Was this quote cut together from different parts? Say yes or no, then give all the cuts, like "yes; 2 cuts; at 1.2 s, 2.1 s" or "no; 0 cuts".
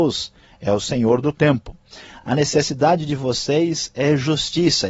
no; 0 cuts